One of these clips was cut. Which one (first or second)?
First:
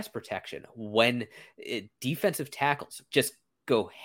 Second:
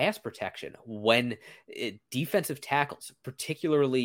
first